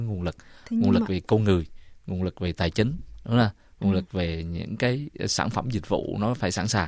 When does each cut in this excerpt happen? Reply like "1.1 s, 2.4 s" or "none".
none